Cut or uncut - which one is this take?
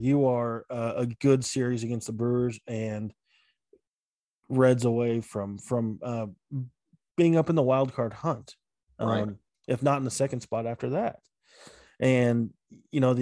uncut